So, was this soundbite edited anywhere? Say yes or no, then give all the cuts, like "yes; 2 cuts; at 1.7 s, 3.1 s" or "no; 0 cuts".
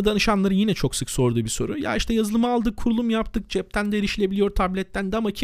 no; 0 cuts